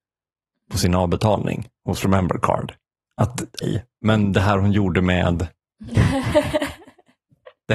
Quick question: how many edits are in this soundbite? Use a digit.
1